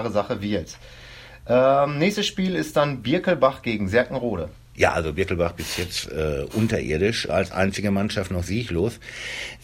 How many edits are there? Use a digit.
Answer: 1